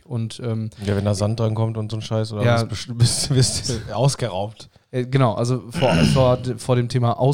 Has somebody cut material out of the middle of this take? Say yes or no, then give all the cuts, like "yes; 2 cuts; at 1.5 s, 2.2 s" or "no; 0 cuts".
no; 0 cuts